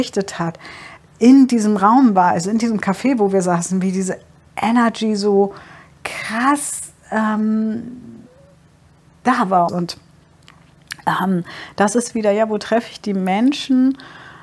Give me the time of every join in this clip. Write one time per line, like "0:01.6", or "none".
0:09.7